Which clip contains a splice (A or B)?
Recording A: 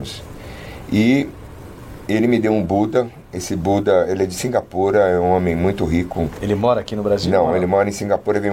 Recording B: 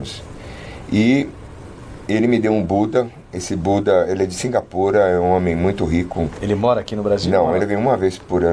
B